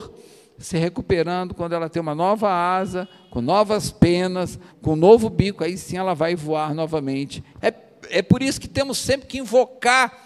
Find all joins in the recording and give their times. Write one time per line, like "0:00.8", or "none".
0:04.7
0:07.6